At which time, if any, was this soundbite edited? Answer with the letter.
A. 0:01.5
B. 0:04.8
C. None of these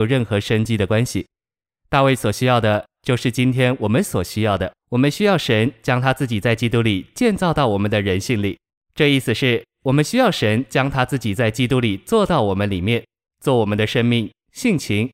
B